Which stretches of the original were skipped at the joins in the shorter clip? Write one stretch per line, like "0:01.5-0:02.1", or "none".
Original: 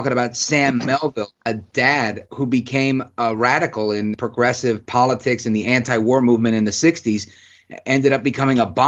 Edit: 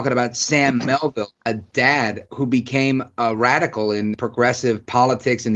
none